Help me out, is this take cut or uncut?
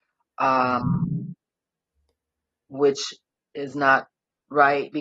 uncut